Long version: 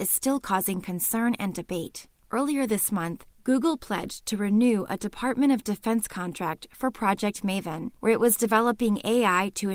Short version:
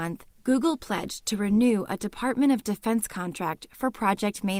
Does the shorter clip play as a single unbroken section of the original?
yes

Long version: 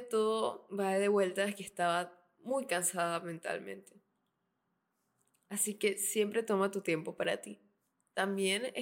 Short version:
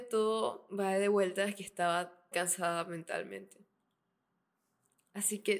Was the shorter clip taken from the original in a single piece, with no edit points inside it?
no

